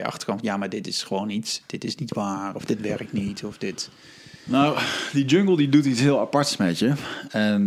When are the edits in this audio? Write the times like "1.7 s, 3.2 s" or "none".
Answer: none